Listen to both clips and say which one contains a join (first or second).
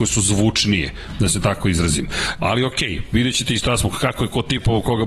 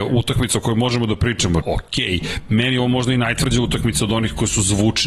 second